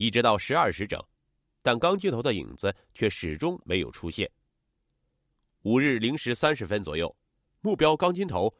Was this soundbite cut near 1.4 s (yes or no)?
yes